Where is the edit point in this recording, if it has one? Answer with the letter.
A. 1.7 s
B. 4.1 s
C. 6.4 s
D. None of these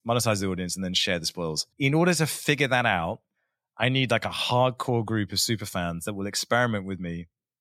A